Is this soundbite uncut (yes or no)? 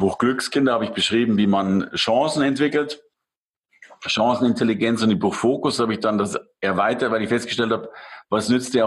yes